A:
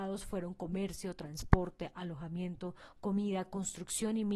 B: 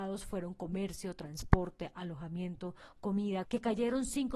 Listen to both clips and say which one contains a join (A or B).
B